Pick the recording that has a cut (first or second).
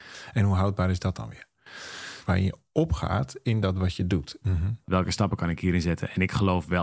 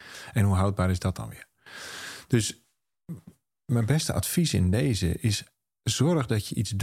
first